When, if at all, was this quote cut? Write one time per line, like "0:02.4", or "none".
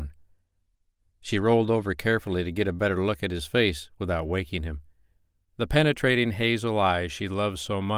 0:01.0